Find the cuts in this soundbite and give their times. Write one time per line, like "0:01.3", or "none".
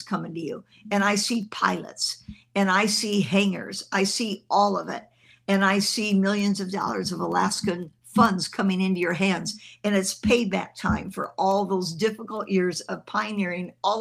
none